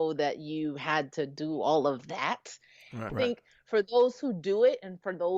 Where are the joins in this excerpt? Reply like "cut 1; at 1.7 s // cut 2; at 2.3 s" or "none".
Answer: cut 1; at 3.1 s